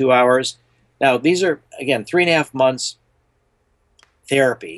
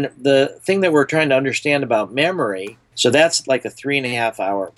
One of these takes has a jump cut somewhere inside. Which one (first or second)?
second